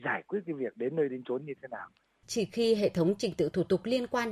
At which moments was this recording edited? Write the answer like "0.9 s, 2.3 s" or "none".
2.2 s